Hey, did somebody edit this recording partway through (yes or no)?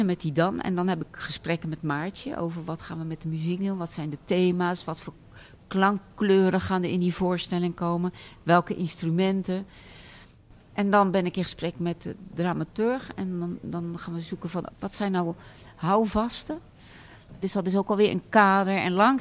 yes